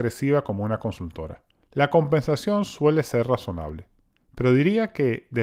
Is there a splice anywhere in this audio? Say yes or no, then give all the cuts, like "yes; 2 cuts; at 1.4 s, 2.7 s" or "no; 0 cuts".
yes; 1 cut; at 1.6 s